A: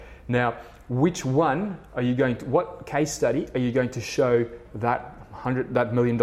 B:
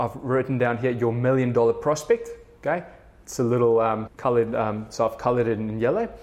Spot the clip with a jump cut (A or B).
B